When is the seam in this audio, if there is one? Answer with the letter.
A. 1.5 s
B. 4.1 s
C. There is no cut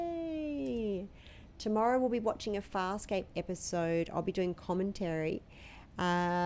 A